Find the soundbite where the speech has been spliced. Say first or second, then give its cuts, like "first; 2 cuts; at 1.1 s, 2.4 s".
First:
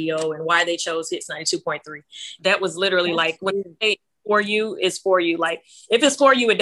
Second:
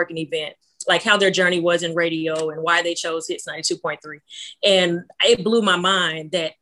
first; 1 cut; at 2.4 s